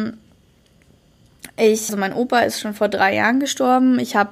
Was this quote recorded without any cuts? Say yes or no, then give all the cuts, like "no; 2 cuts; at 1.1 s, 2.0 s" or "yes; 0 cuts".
no; 1 cut; at 1.9 s